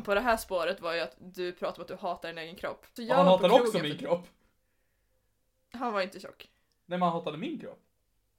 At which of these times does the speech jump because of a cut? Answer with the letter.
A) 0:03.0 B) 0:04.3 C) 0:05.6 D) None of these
A